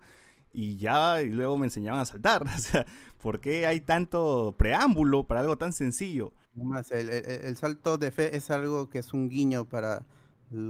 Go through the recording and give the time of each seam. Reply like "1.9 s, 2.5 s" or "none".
5.3 s, 6.4 s